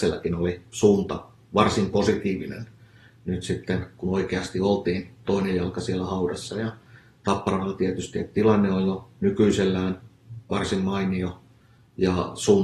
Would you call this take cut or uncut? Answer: uncut